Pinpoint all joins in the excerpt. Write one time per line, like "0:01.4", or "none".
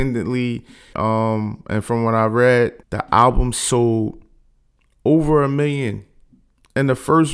0:00.9
0:02.8

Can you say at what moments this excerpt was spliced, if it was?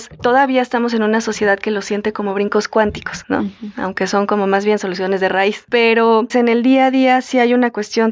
0:03.2
0:06.3

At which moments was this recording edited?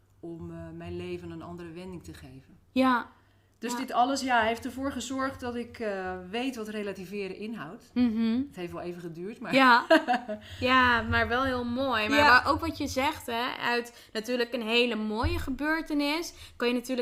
none

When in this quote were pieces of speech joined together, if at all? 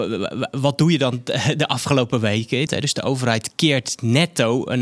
0:02.7

